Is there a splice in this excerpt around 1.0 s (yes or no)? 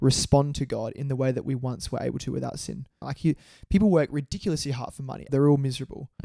no